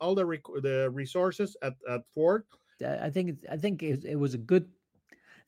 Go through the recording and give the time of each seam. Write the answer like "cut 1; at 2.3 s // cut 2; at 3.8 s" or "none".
cut 1; at 2.8 s